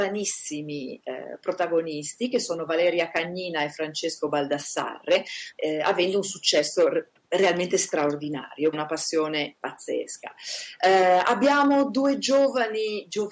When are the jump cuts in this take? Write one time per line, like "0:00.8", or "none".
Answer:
0:05.5
0:08.7

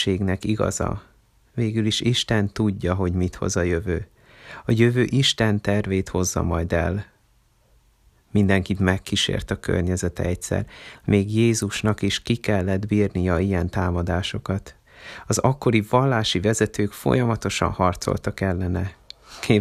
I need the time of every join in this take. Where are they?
none

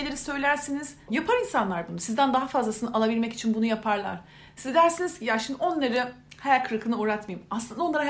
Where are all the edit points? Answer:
0:01.1

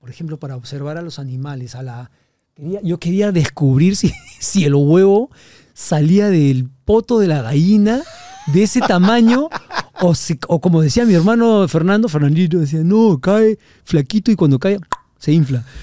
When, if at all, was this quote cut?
none

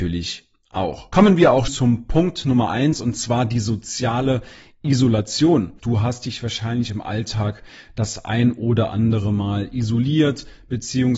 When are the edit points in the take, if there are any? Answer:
0:01.7
0:05.8

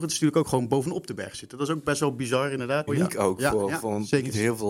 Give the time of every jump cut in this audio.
0:02.9

